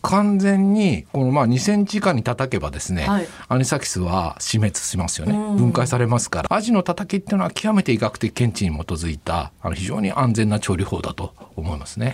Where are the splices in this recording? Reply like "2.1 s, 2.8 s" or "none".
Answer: 6.5 s